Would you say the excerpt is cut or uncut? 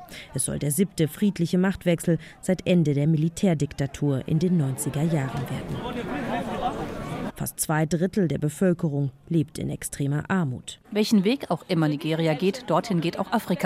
cut